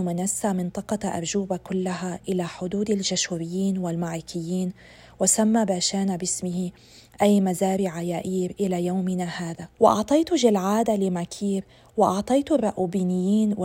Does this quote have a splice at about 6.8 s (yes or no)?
no